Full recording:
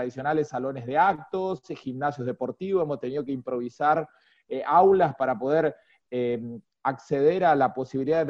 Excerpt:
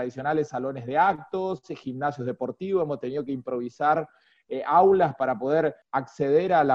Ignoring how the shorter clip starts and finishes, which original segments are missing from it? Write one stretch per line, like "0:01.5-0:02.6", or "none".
0:05.8-0:06.7